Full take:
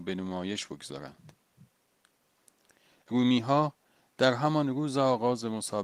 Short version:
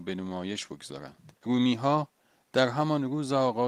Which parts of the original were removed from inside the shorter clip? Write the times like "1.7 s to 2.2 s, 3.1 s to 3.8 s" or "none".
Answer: 1.4 s to 3.0 s